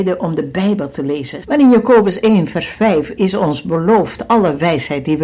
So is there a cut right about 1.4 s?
yes; 1 cut; at 1.4 s

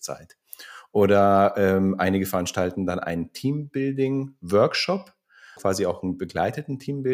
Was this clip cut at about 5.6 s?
yes; 1 cut; at 5.6 s

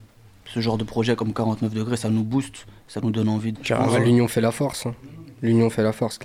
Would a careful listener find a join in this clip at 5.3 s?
no; 1 cut; at 3.5 s

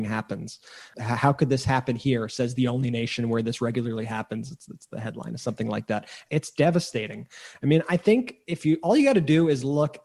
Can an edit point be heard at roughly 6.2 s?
yes; 1 cut; at 6.2 s

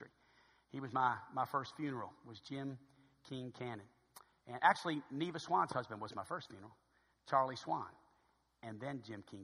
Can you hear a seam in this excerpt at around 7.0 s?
no; 0 cuts

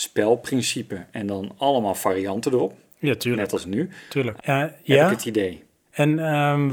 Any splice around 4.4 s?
yes; 1 cut; at 4.4 s

